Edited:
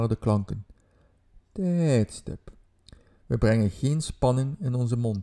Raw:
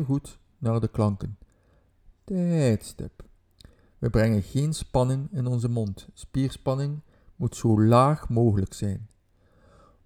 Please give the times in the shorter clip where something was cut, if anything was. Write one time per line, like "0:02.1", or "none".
none